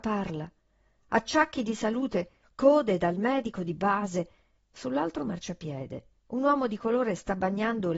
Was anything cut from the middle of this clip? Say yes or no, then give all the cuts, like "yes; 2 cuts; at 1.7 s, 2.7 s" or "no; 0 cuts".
yes; 3 cuts; at 2.4 s, 4.6 s, 6.2 s